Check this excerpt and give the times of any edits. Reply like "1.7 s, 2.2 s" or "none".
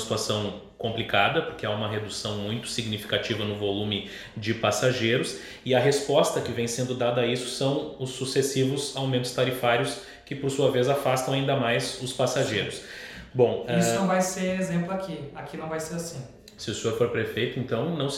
13.3 s, 16.6 s